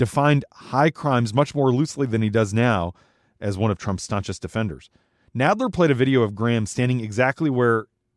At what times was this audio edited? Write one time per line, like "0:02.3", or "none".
none